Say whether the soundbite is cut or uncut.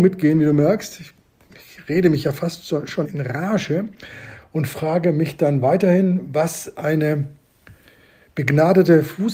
cut